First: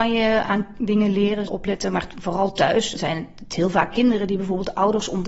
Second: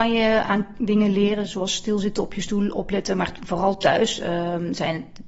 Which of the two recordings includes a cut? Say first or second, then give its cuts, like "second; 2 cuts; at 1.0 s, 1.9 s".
first; 2 cuts; at 1.5 s, 3.0 s